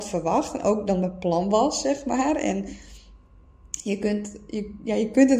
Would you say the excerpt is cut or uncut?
uncut